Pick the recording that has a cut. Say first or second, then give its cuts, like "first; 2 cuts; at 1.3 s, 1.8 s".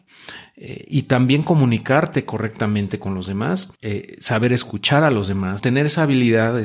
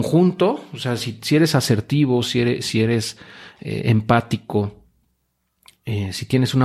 first; 2 cuts; at 3.7 s, 5.6 s